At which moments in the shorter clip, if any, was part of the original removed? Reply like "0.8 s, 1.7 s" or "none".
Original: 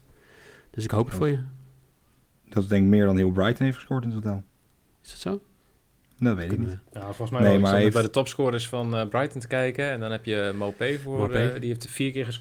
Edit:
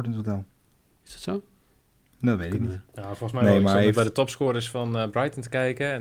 none